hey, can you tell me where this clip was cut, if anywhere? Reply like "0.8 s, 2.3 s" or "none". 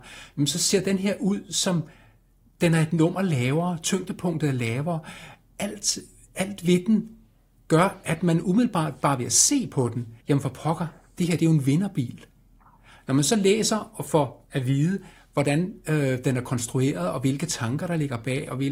10.2 s